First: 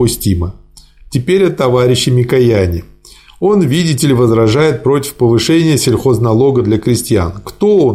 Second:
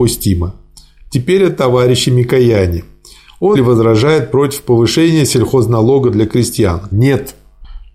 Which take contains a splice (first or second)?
second